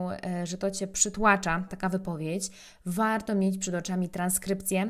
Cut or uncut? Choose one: cut